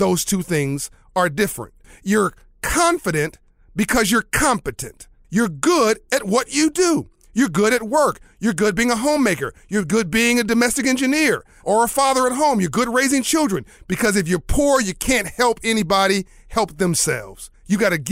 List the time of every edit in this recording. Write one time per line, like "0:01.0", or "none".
0:11.6
0:13.8